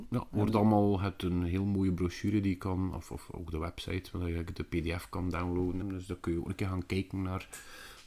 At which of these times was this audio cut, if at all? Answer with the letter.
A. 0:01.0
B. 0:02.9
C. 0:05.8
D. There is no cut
C